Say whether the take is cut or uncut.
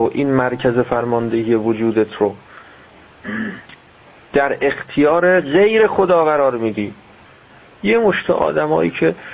uncut